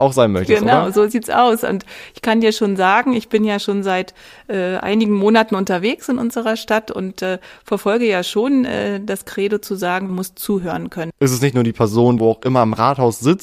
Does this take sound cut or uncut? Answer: cut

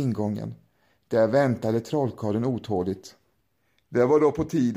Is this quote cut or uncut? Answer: uncut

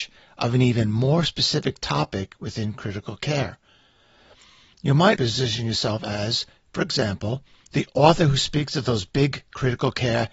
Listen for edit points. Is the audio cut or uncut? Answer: cut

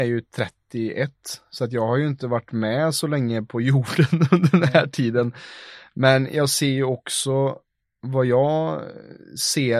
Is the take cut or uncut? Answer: uncut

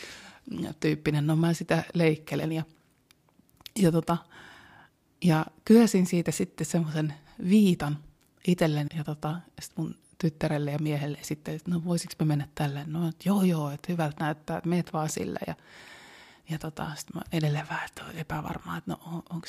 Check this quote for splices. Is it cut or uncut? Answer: cut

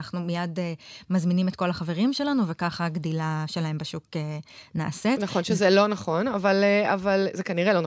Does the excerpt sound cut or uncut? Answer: uncut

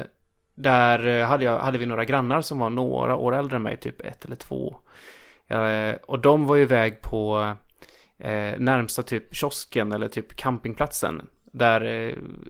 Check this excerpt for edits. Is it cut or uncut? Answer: uncut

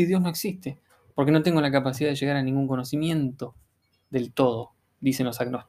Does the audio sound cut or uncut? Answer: uncut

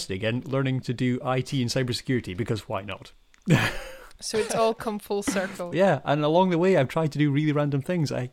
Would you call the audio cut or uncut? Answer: cut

